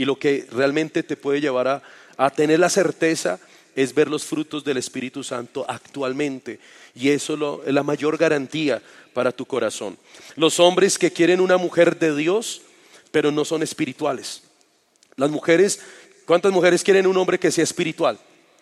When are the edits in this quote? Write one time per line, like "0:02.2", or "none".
none